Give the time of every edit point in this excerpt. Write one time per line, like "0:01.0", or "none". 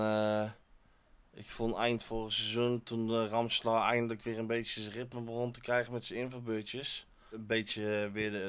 0:07.3